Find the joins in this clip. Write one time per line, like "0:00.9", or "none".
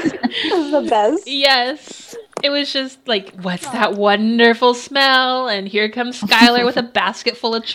none